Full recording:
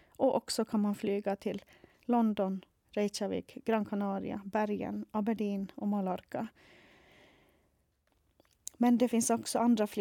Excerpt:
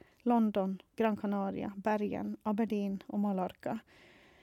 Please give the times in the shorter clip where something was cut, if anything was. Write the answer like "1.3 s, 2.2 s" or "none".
0.9 s